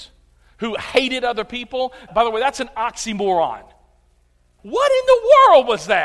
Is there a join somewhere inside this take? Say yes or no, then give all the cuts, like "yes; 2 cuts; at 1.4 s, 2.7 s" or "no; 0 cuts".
yes; 2 cuts; at 2.1 s, 4.6 s